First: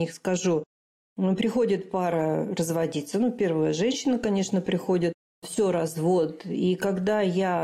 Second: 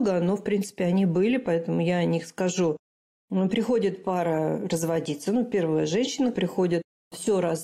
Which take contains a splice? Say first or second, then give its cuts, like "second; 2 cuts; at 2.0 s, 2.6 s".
second; 1 cut; at 6.3 s